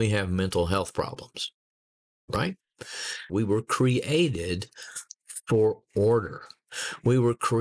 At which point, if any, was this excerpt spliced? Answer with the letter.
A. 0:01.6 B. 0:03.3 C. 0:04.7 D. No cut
B